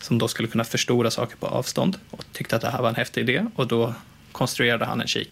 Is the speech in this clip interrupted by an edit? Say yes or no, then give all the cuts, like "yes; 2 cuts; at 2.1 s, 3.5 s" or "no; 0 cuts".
yes; 1 cut; at 2.1 s